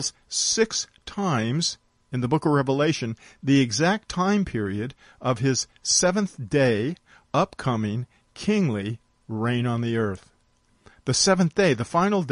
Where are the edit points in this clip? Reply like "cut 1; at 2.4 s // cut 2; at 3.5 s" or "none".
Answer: none